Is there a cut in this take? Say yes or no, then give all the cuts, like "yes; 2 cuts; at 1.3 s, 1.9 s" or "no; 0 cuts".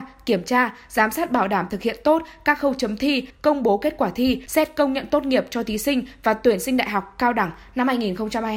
yes; 2 cuts; at 3.3 s, 4.5 s